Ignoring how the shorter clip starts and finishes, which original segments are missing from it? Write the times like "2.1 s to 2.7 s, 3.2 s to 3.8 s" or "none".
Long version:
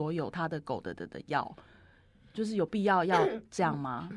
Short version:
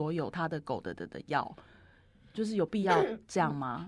2.8 s to 3.1 s